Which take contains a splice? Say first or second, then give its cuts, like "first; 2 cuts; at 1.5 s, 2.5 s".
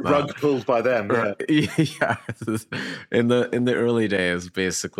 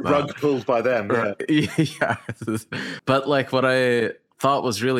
second; 1 cut; at 3.0 s